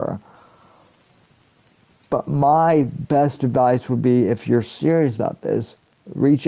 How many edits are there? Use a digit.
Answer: 0